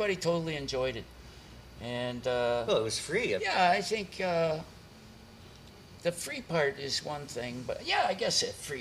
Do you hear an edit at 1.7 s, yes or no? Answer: no